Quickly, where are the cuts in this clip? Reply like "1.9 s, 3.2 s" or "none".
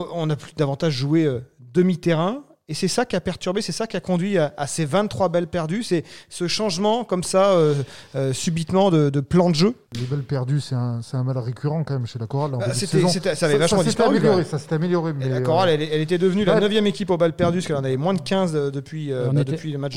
none